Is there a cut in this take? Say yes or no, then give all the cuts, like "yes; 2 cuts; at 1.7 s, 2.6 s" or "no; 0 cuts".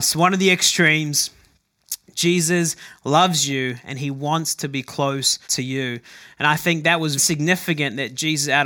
yes; 2 cuts; at 5.4 s, 7.2 s